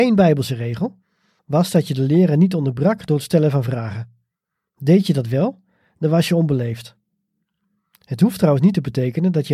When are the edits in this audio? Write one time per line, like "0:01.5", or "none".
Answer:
none